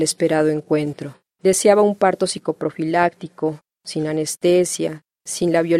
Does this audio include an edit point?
yes; 1 cut; at 1.3 s

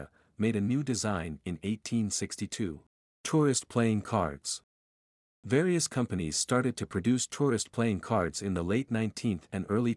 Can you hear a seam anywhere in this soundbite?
yes; 1 cut; at 3.2 s

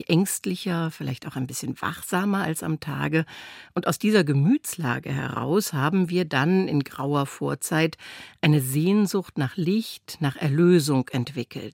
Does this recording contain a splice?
no; 0 cuts

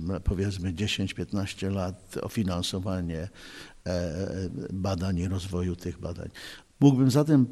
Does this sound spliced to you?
yes; 1 cut; at 6.6 s

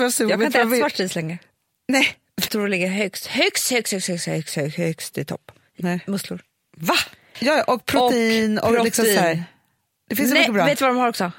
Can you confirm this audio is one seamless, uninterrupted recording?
no; 2 cuts; at 2.5 s, 7.3 s

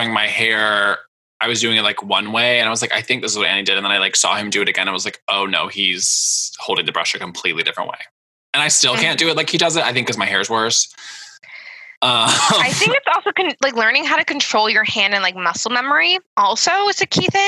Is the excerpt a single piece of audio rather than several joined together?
yes; 0 cuts

